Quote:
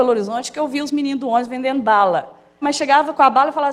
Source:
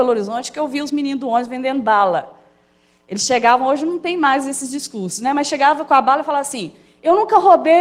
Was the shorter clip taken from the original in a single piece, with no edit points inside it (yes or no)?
no